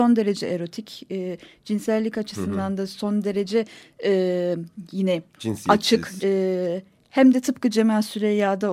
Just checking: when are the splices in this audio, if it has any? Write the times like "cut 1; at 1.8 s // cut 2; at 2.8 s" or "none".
cut 1; at 6.2 s